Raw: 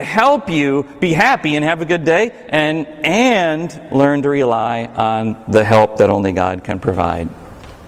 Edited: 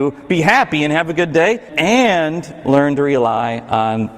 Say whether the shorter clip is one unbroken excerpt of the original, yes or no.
no